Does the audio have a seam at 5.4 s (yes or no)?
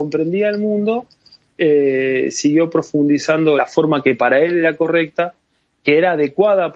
no